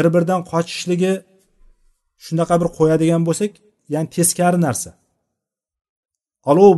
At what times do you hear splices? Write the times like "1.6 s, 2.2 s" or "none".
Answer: none

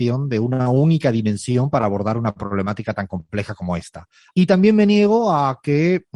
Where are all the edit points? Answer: 4.3 s

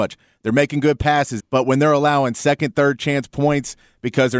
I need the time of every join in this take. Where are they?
1.4 s

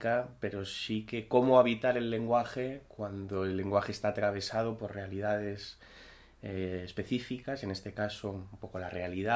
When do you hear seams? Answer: none

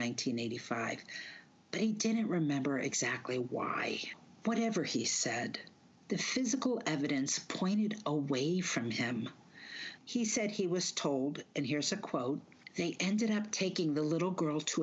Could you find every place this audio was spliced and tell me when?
10.0 s

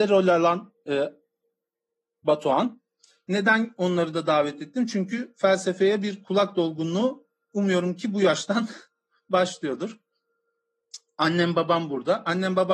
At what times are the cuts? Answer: 2.2 s

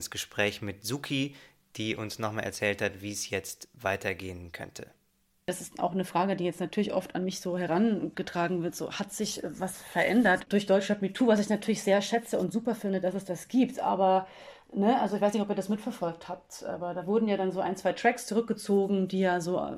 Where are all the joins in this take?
none

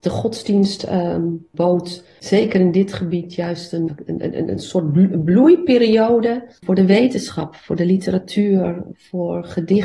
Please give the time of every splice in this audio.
3.9 s, 6.6 s

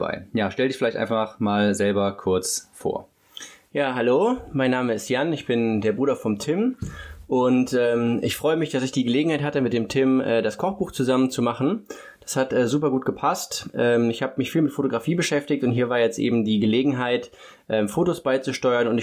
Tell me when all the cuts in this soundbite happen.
none

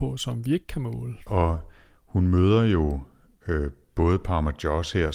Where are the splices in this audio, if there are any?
1.3 s

